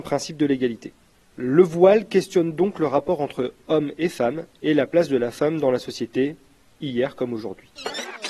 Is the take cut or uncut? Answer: uncut